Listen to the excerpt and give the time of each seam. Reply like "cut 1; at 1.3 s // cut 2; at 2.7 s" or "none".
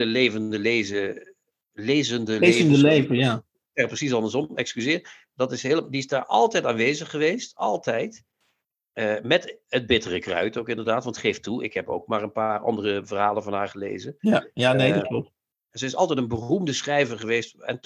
none